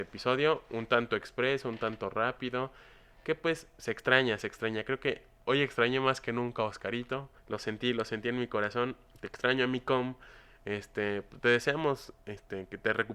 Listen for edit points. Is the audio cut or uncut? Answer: cut